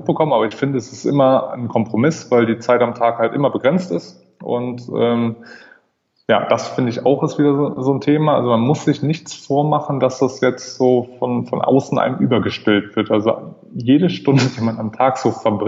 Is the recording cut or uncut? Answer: uncut